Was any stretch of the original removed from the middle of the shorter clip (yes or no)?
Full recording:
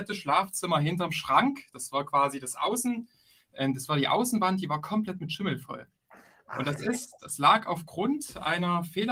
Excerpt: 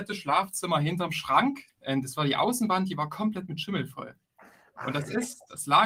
yes